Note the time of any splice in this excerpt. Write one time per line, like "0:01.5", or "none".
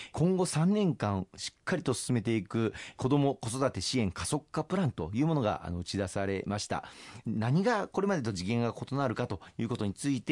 none